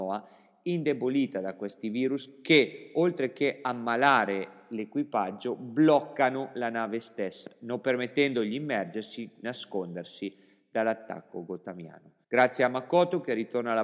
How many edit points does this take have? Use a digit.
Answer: 2